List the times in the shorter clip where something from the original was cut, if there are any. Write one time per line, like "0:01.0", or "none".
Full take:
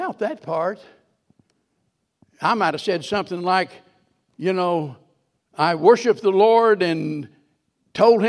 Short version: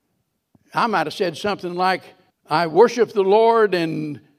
0:02.3